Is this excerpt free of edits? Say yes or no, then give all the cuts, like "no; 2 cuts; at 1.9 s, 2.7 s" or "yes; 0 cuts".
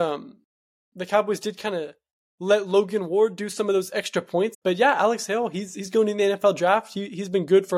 no; 1 cut; at 4.5 s